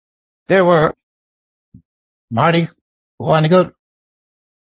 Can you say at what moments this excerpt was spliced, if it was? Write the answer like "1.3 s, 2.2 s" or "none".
none